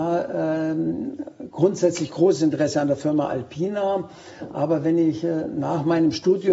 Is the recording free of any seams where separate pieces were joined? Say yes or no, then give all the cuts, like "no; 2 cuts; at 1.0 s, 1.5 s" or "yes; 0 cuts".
yes; 0 cuts